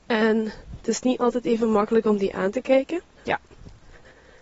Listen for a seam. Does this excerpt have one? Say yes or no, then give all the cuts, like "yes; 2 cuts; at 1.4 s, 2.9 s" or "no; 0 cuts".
yes; 1 cut; at 3.2 s